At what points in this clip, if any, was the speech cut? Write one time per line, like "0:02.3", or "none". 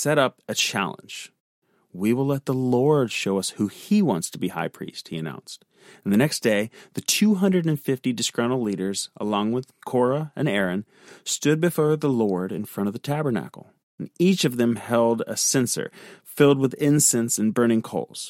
none